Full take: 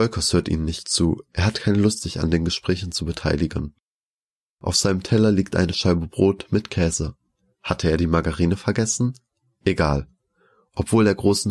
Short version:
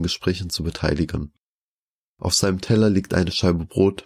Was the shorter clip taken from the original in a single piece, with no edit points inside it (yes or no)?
yes